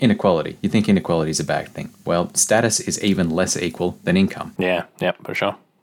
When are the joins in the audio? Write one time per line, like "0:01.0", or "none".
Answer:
none